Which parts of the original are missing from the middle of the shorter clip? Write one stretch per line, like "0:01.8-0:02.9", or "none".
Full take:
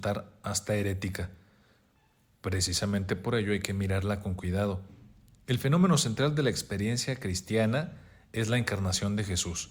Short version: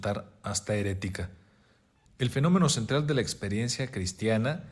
0:02.1-0:05.3

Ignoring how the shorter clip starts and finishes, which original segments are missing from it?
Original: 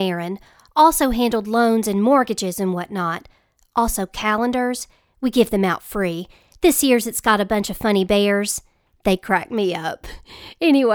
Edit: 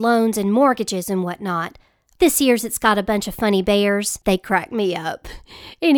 0:03.7-0:06.6
0:08.6-0:09.0

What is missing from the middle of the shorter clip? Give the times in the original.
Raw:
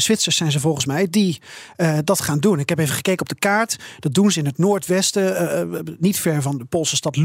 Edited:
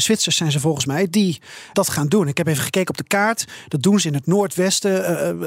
0:01.7-0:02.1

